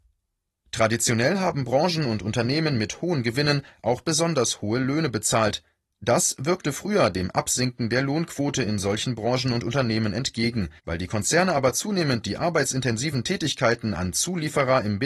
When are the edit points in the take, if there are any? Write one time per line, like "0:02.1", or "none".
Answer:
0:10.8